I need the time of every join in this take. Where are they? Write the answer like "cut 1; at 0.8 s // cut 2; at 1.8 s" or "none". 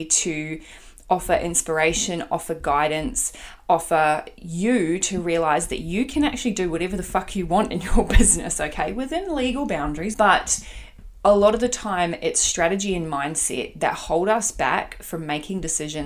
cut 1; at 10.1 s